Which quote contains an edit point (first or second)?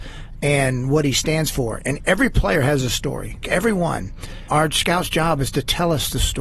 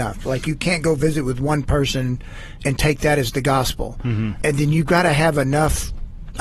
first